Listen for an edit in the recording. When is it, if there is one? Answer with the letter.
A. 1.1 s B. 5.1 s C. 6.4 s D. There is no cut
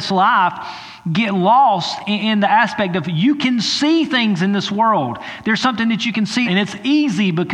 C